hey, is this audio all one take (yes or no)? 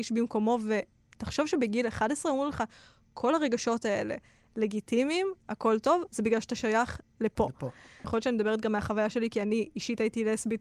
no